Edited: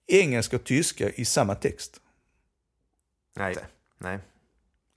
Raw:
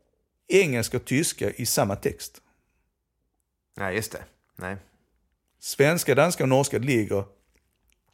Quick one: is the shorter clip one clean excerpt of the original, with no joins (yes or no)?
no